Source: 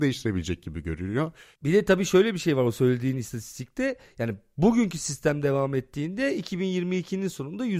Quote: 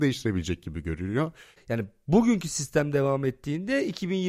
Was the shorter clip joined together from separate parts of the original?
yes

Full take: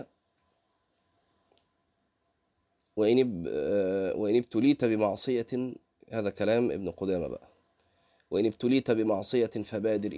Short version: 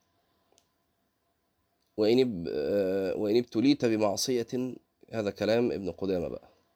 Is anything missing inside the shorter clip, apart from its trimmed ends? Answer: no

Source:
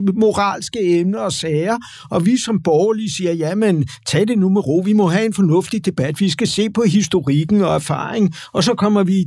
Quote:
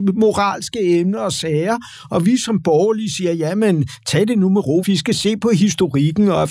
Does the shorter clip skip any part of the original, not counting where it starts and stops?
yes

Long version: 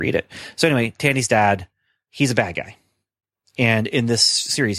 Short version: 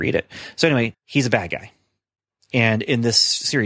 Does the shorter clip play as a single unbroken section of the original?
no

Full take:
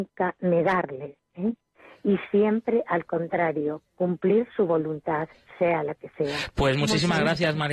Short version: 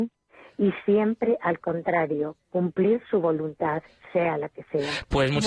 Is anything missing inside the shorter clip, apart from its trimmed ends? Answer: no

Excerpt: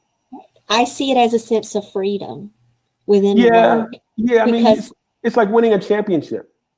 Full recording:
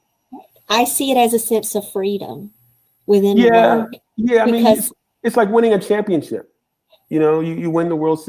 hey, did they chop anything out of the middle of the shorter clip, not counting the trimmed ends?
no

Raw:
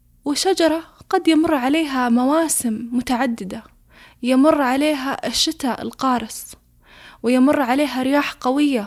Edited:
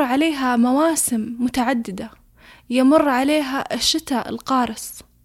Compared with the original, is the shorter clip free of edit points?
yes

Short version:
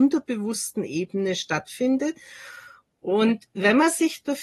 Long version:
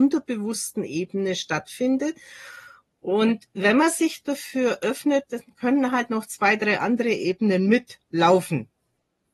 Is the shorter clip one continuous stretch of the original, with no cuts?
yes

